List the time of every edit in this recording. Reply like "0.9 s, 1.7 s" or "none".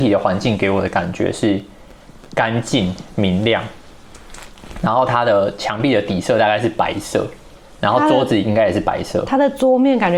none